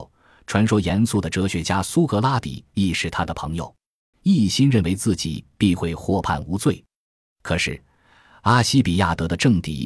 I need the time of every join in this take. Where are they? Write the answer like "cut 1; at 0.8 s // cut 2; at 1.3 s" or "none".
cut 1; at 4.1 s